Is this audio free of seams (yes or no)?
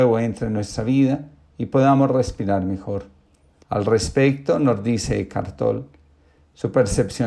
no